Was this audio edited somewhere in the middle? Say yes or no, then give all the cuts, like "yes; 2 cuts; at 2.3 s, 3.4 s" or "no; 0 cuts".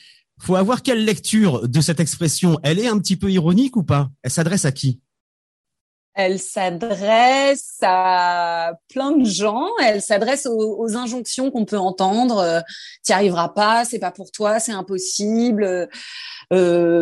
no; 0 cuts